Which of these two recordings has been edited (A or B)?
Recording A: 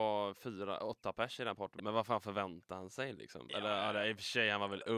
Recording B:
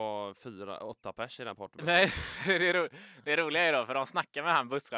A